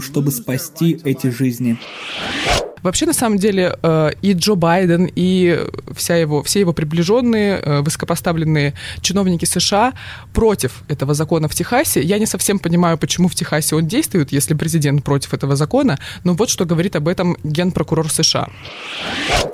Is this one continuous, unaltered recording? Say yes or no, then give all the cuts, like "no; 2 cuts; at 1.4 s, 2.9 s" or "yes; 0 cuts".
yes; 0 cuts